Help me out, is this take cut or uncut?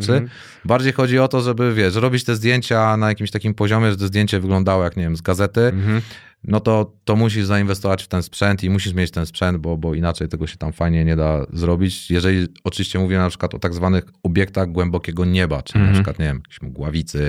uncut